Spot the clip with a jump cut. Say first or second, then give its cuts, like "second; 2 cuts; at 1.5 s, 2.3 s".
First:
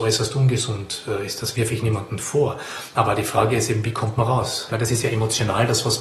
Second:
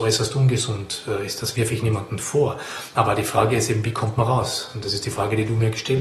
first; 1 cut; at 4.7 s